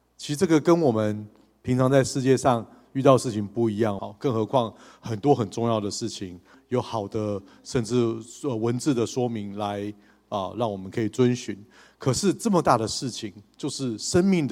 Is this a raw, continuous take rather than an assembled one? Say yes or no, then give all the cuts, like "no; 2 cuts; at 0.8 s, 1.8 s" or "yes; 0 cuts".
no; 2 cuts; at 4.0 s, 6.5 s